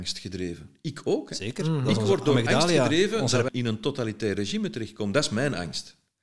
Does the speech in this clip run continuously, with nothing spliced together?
no; 1 cut; at 3.5 s

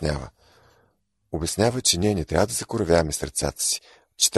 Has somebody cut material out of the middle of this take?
no; 0 cuts

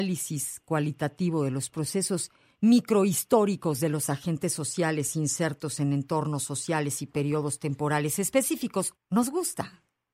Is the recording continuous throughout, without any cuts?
no; 1 cut; at 8.9 s

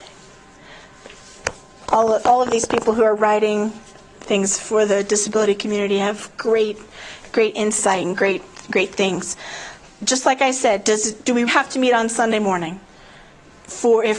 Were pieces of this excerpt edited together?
yes; 2 cuts; at 9.9 s, 11.5 s

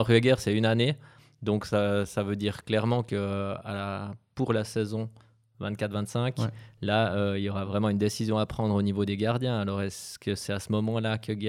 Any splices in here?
no; 0 cuts

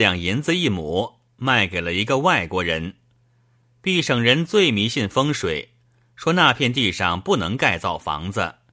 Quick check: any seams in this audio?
no; 0 cuts

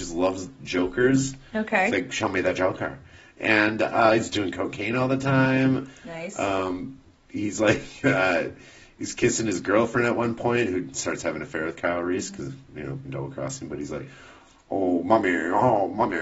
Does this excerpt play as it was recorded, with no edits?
no; 1 cut; at 13.0 s

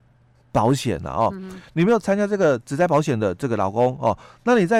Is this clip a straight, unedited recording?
yes; 0 cuts

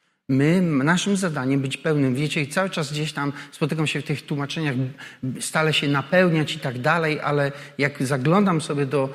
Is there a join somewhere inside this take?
no; 0 cuts

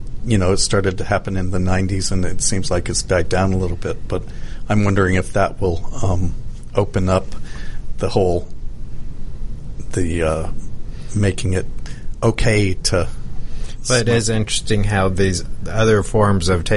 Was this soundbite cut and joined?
no; 0 cuts

